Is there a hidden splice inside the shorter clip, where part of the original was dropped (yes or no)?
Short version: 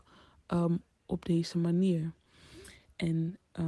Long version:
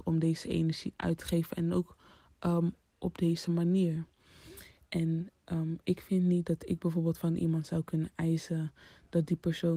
no